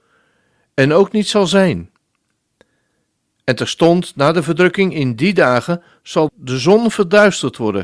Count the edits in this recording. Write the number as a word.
one